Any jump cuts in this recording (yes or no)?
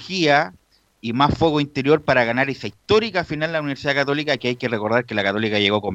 no